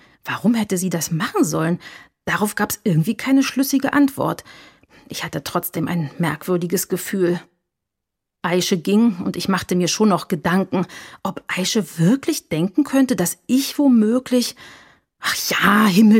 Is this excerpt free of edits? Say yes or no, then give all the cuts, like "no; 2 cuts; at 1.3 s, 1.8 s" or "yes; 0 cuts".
yes; 0 cuts